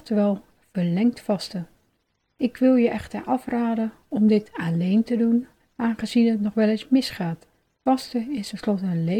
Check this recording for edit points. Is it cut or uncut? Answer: cut